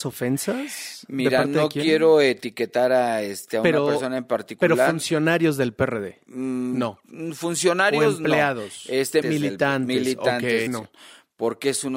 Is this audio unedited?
no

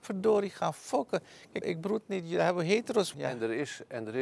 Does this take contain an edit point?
yes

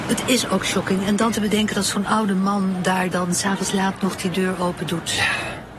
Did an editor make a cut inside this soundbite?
no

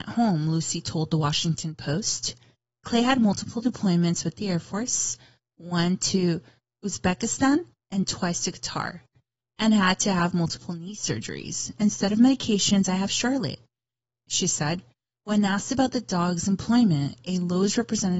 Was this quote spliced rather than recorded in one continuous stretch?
no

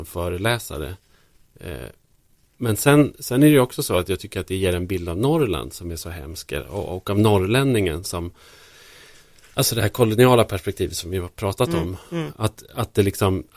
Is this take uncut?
yes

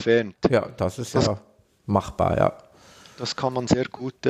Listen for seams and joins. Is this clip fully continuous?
yes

